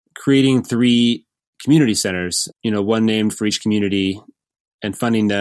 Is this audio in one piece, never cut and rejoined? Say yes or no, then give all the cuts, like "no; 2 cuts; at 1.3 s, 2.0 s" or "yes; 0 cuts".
no; 1 cut; at 2.5 s